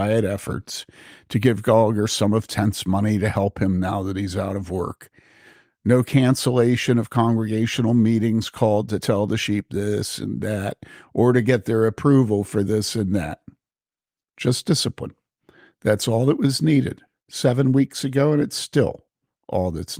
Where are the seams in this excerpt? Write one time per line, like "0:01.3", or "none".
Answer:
none